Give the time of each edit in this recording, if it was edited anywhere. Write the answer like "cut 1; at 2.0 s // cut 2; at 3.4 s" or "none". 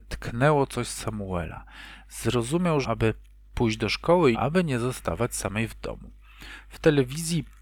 cut 1; at 2.8 s // cut 2; at 4.3 s